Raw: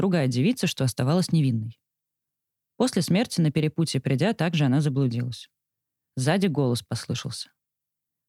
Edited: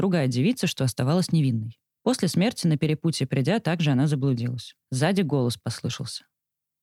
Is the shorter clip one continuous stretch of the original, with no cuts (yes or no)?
no